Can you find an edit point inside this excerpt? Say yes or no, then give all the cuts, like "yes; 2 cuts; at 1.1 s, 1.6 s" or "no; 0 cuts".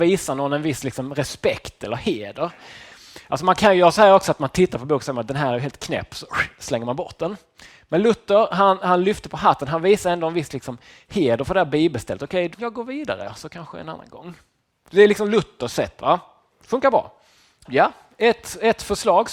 yes; 2 cuts; at 12.5 s, 17.7 s